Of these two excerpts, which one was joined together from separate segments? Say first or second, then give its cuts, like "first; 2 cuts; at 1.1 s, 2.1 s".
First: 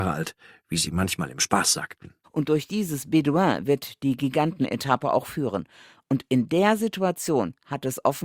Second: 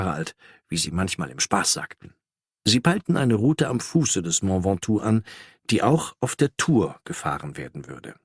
first; 1 cut; at 2.2 s